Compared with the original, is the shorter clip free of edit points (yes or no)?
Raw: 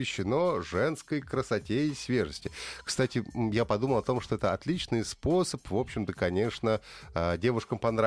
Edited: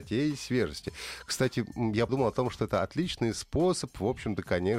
no